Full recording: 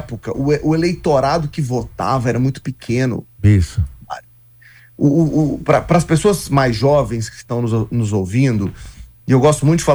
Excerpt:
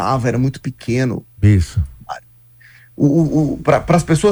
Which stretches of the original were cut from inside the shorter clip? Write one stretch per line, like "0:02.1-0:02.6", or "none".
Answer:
none